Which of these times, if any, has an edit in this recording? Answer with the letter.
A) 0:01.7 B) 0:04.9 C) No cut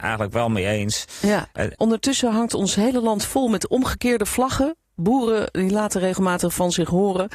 A